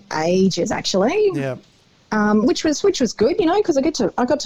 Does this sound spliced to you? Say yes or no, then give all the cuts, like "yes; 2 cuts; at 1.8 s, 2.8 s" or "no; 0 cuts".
no; 0 cuts